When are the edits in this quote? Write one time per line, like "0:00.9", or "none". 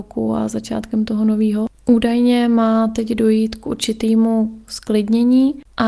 0:01.7